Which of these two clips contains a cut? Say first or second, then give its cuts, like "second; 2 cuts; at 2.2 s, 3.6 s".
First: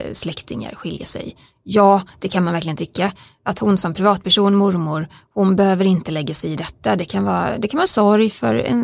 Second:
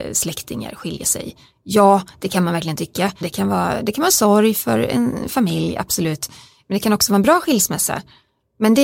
second; 1 cut; at 3.2 s